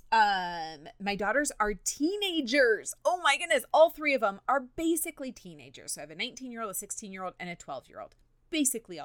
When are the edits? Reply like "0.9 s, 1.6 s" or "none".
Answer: none